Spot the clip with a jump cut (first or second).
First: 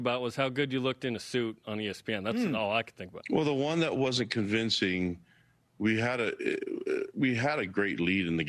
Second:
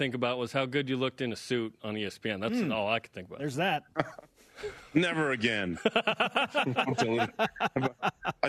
first